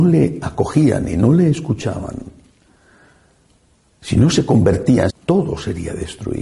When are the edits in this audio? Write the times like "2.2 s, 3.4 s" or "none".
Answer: 5.1 s

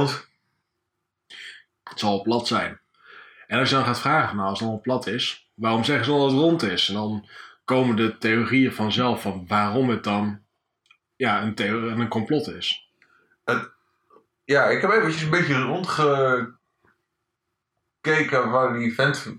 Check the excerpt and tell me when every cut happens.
1.7 s

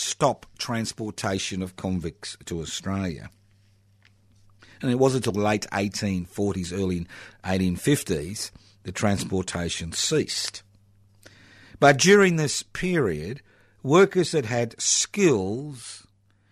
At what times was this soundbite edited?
none

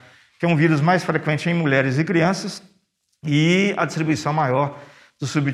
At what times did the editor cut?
none

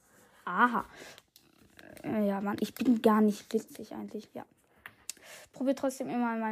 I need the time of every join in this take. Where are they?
none

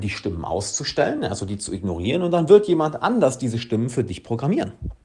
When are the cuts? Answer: none

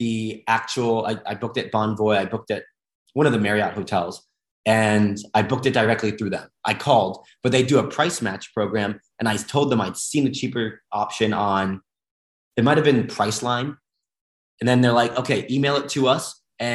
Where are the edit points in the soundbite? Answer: none

